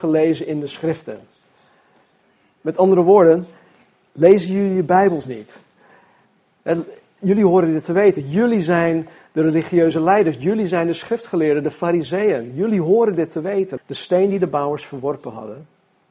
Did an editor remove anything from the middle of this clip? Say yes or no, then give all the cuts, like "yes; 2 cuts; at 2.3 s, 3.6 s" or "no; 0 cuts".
yes; 1 cut; at 13.8 s